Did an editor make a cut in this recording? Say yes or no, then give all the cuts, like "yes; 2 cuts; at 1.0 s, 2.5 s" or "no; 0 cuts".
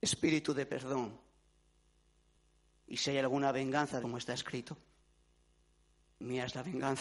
yes; 1 cut; at 4.0 s